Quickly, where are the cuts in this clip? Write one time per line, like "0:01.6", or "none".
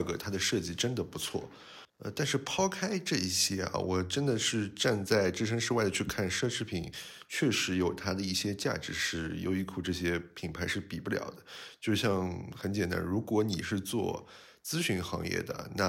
0:01.9